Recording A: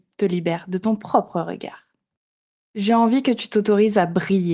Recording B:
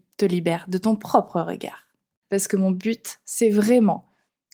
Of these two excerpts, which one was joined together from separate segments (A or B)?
B